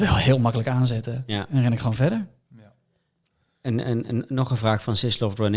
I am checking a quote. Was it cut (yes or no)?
no